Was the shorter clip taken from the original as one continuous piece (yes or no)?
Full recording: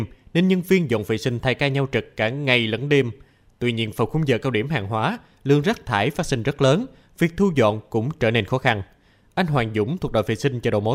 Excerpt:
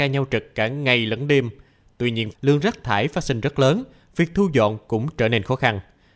no